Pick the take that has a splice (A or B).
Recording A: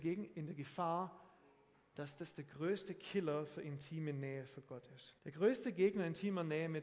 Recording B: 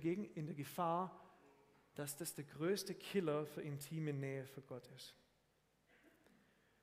A